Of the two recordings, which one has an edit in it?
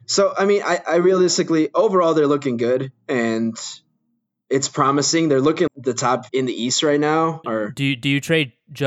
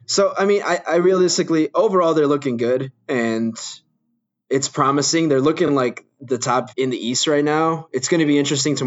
first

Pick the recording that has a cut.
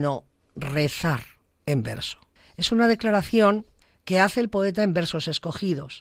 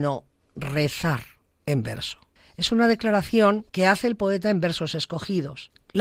second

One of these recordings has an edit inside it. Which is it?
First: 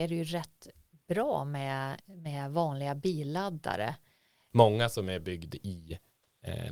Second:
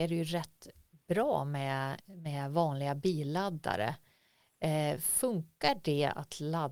first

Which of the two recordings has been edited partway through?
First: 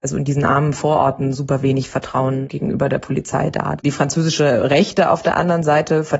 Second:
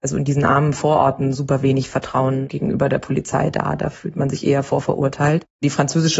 first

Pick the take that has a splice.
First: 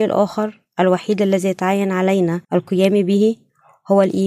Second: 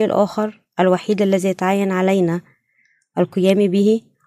first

